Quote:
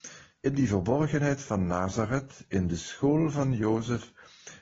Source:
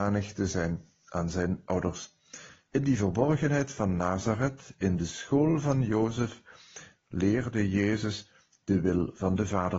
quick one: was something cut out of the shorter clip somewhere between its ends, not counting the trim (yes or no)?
no